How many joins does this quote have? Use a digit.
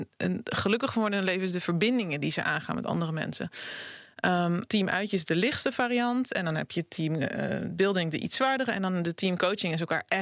1